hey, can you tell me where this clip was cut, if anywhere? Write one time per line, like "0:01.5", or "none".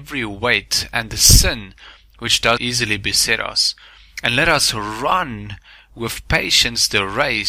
0:02.6